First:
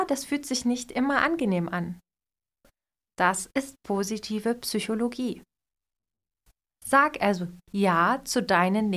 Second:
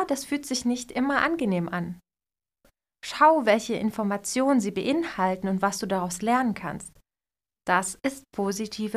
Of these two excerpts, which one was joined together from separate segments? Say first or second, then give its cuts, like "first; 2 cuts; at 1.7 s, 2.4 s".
first; 1 cut; at 3.0 s